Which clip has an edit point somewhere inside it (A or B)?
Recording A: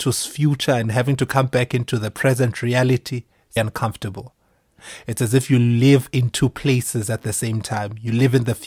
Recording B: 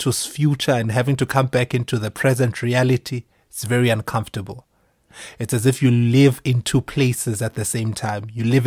A